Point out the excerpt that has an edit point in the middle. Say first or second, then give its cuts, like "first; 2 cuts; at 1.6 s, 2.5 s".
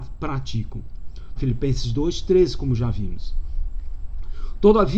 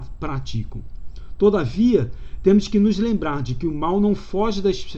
first; 1 cut; at 1.4 s